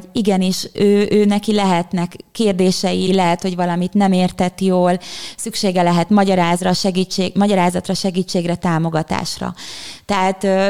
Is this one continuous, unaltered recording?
no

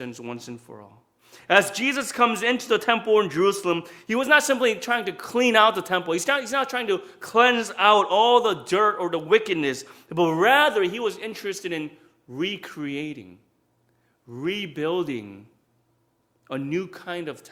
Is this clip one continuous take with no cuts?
yes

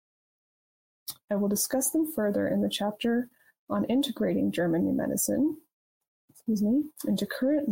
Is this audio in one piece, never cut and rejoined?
no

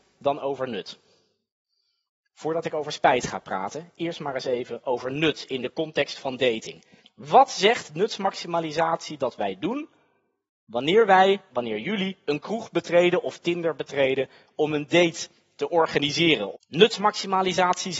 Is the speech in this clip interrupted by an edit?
yes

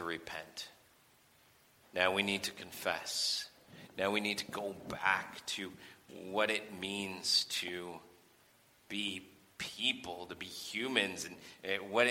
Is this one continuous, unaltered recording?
yes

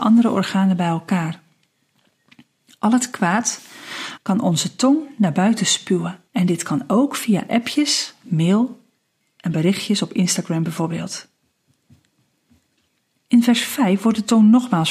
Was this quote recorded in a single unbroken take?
no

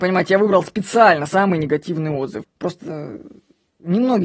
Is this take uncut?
no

